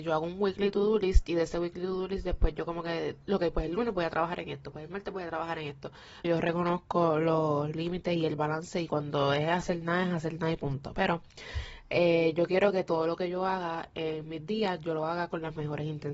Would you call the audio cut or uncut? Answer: cut